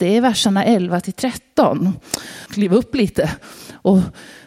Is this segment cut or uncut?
cut